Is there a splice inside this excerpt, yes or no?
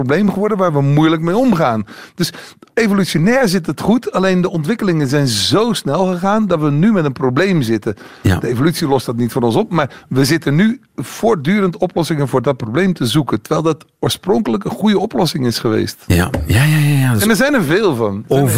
no